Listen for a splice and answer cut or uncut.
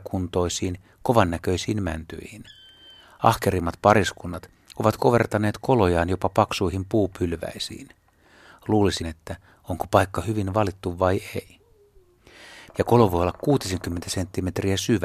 cut